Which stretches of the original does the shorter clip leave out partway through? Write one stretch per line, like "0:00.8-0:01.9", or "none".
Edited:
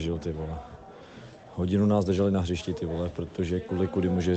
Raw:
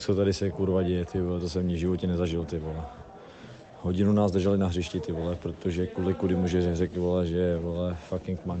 none